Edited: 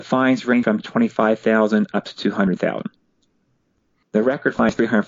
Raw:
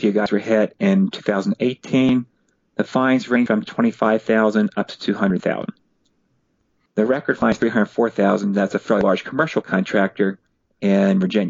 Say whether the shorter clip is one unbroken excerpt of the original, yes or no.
yes